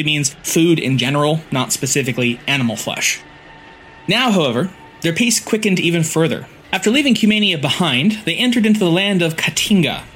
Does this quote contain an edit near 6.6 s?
yes; 1 cut; at 6.6 s

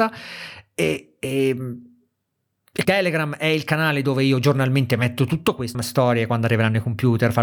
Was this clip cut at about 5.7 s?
yes; 2 cuts; at 2.8 s, 5.7 s

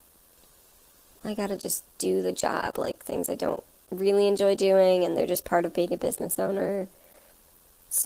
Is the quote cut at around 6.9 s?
no; 1 cut; at 1.1 s

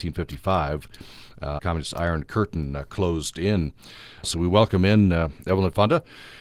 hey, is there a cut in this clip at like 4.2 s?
no; 1 cut; at 1.6 s

